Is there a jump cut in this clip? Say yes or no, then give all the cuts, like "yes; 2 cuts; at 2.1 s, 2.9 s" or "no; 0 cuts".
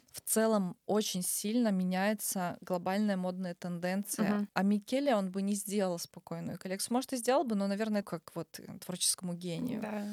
yes; 2 cuts; at 4.5 s, 8.0 s